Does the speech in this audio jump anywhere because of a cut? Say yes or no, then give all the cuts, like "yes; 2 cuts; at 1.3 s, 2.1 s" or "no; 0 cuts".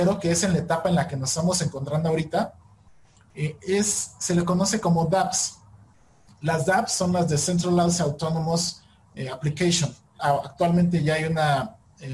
yes; 1 cut; at 10.2 s